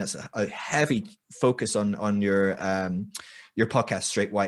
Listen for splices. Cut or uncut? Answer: uncut